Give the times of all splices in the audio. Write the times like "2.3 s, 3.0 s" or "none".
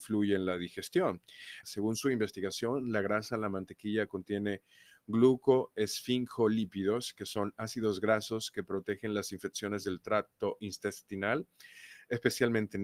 1.6 s

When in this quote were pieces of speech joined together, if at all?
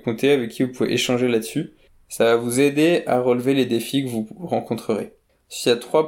none

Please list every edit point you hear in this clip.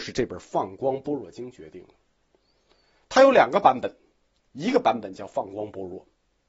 none

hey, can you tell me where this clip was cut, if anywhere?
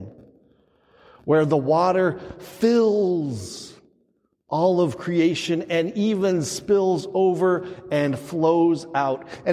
none

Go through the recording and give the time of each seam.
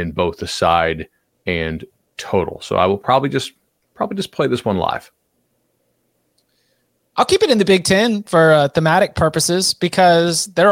none

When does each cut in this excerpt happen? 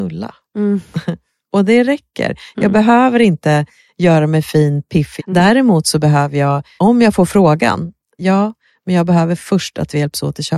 5.2 s, 6.8 s, 8.2 s

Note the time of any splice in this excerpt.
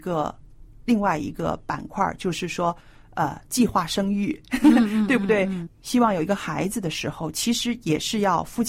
5.7 s

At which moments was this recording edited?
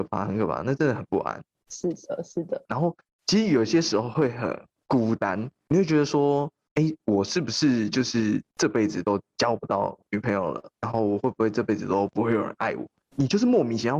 2.7 s

